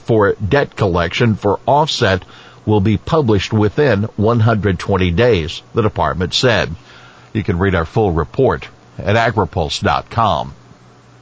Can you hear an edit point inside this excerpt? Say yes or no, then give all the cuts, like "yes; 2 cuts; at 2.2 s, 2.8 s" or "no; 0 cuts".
no; 0 cuts